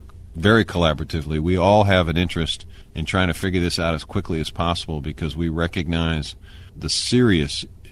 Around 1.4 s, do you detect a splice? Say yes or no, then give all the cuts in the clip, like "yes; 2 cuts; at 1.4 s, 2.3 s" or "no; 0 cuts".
no; 0 cuts